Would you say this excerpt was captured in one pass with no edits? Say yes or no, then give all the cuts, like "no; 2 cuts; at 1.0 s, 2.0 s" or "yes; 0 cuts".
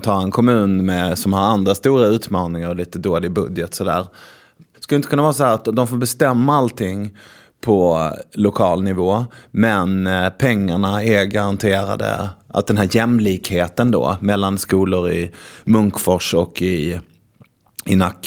yes; 0 cuts